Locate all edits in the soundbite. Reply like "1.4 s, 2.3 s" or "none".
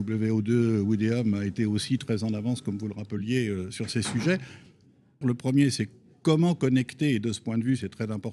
5.2 s